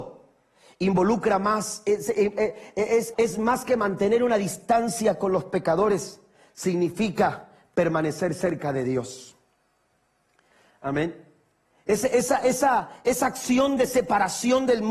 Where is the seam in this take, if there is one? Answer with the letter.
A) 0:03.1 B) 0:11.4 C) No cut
A